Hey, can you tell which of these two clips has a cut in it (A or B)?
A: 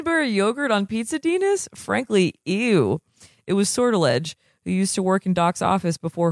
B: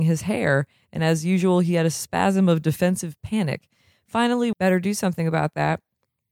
B